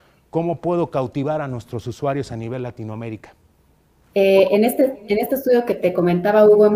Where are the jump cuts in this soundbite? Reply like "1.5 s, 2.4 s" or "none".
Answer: none